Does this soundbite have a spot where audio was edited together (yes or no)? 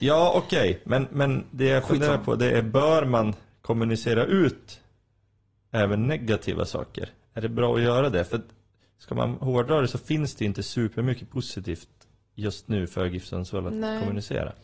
no